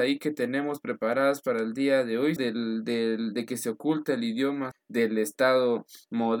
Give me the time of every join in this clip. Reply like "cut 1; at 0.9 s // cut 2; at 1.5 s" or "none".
cut 1; at 2.4 s // cut 2; at 4.7 s